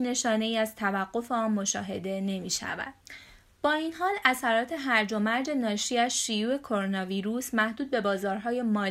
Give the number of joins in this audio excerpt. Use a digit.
0